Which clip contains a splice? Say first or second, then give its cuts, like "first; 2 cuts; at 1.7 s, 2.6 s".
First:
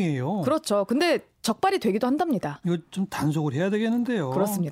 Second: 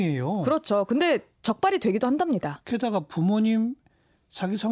first; 1 cut; at 2.6 s